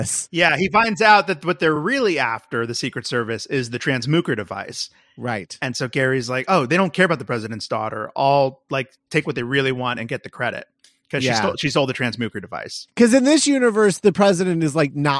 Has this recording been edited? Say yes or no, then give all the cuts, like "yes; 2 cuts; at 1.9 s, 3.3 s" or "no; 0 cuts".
no; 0 cuts